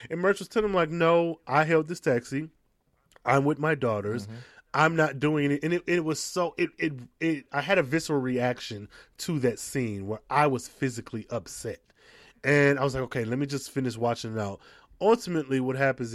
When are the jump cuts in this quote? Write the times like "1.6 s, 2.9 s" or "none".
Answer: none